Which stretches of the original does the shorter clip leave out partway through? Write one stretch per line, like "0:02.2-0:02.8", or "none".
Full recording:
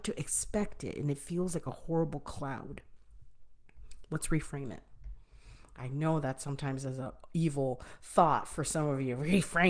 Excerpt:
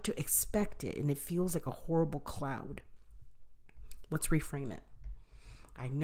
none